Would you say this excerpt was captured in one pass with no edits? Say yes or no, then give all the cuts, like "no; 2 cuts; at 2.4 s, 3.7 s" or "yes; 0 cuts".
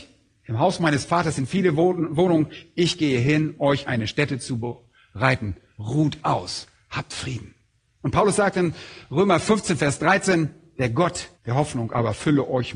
no; 2 cuts; at 3.6 s, 11.3 s